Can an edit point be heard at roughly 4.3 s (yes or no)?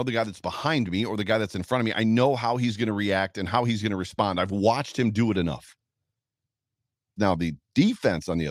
no